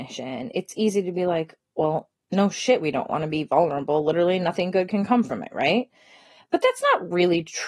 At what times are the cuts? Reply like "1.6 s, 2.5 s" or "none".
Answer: none